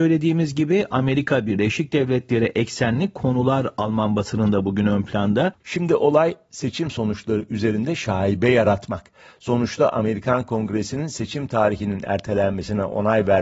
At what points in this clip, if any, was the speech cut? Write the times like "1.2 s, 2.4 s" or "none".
5.6 s